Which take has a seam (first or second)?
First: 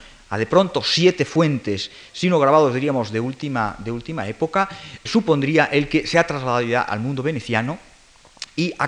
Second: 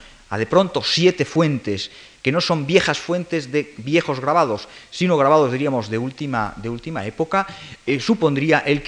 first